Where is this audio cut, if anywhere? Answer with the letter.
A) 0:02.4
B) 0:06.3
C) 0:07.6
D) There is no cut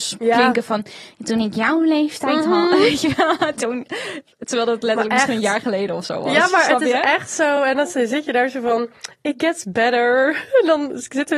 D